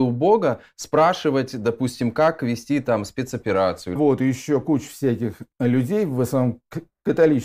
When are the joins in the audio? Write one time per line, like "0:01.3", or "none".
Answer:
0:04.0
0:05.5